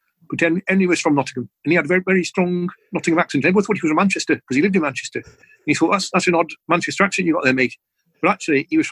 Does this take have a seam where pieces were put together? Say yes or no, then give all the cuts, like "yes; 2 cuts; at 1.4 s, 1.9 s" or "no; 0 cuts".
no; 0 cuts